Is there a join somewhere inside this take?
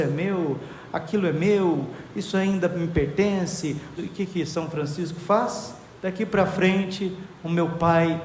yes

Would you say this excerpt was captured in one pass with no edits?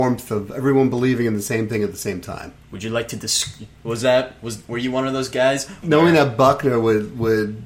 no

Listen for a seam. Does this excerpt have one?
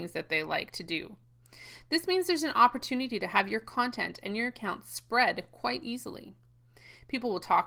no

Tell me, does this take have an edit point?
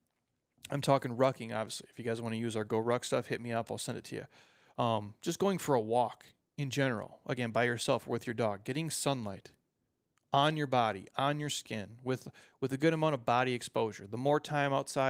no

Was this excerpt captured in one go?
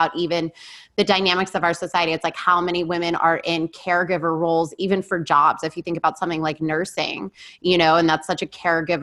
yes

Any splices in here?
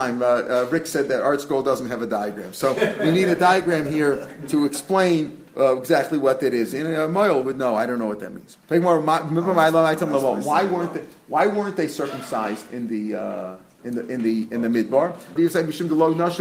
yes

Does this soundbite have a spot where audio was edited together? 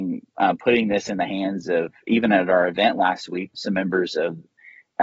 yes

